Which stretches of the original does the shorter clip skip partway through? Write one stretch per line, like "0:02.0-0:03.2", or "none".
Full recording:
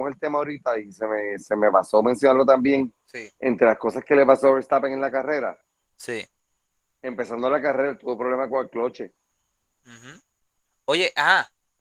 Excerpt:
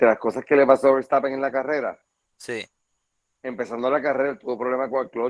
none